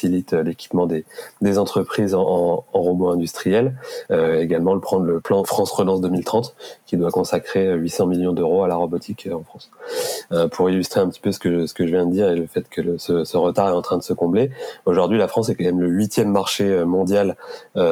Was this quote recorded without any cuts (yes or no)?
no